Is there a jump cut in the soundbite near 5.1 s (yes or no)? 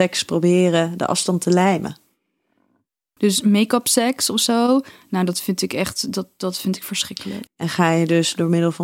no